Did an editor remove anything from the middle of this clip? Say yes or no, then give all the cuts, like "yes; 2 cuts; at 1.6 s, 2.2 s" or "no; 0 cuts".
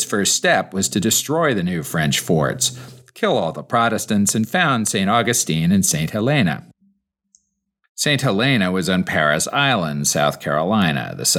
no; 0 cuts